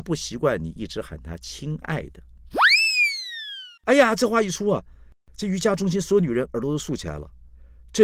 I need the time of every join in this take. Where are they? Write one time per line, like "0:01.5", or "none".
0:03.8